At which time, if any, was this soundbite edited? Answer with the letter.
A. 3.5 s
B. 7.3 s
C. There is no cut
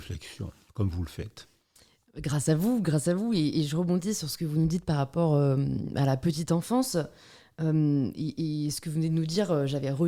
C